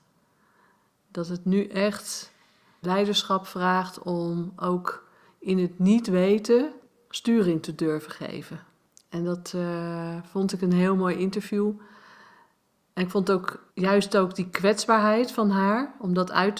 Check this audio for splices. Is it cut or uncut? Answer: cut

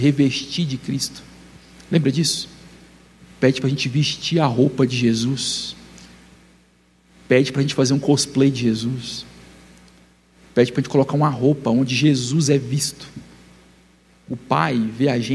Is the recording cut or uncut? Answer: uncut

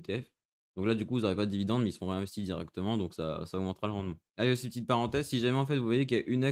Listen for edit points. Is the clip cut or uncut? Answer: uncut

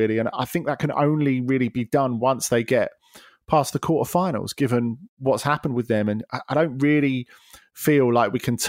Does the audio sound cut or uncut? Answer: uncut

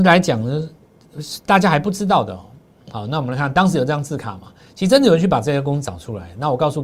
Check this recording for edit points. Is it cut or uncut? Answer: uncut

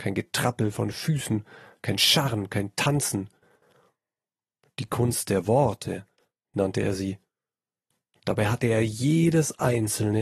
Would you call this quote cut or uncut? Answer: uncut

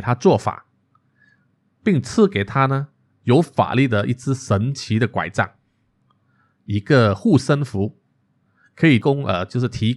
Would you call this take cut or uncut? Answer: uncut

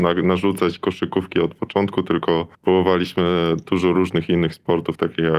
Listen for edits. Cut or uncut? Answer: cut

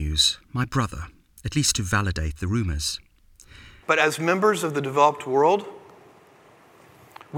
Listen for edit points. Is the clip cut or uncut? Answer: cut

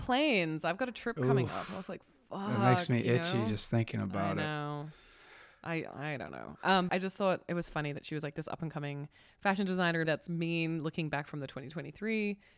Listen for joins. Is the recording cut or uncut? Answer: cut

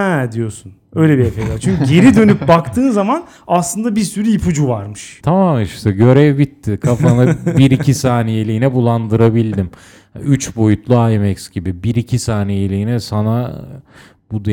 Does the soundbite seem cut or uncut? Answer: cut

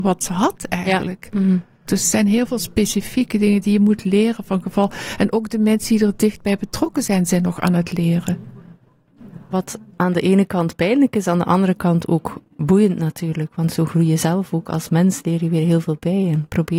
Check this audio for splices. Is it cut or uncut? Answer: cut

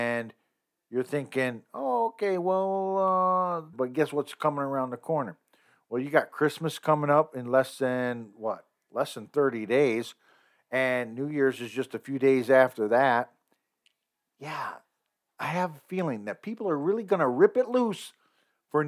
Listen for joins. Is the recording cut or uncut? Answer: cut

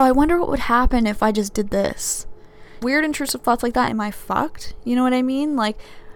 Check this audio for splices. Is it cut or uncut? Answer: cut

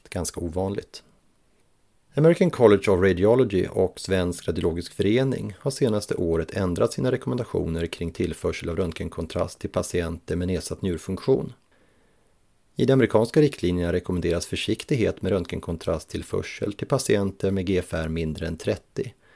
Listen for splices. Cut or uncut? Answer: uncut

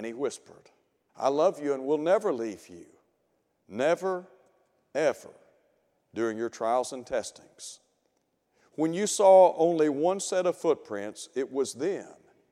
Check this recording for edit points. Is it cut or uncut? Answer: cut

